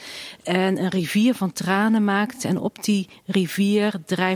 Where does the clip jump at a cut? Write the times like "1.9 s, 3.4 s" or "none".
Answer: none